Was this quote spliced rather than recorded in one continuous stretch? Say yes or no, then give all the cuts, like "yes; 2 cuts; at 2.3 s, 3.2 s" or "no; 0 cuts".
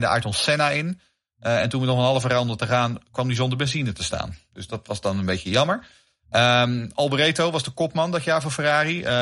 no; 0 cuts